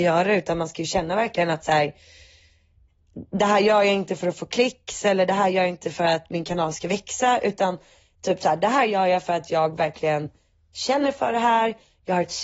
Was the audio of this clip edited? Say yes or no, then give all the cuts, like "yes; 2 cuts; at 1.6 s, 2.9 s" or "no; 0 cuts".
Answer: no; 0 cuts